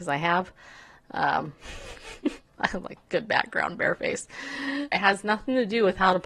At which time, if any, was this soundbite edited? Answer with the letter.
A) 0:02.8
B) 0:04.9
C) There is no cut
B